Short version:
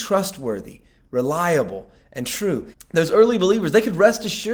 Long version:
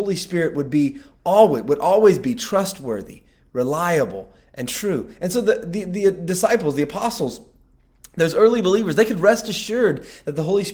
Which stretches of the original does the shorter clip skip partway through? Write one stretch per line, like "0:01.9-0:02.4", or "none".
0:05.1-0:08.0